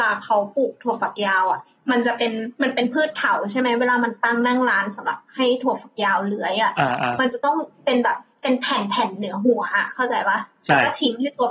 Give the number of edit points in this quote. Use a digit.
1